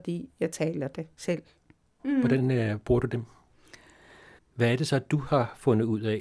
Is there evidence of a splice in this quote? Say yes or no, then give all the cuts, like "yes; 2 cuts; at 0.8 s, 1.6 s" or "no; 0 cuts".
yes; 2 cuts; at 2.0 s, 4.4 s